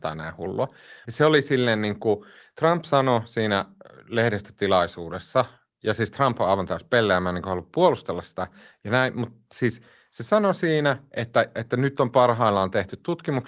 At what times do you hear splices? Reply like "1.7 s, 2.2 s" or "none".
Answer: 1.0 s, 11.5 s